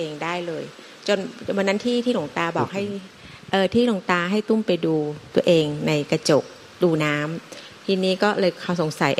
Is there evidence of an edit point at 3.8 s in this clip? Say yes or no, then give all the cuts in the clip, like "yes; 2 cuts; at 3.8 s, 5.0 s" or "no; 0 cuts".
no; 1 cut; at 7.0 s